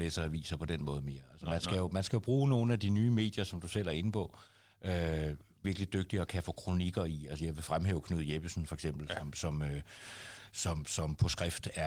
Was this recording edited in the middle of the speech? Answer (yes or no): yes